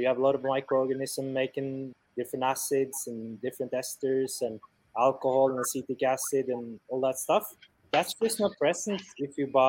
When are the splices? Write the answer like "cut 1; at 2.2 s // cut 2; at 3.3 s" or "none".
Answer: none